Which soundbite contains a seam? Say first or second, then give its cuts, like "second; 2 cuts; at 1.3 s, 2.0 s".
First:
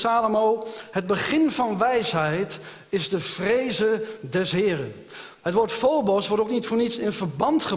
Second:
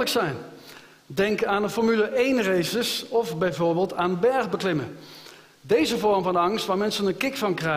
first; 1 cut; at 5.3 s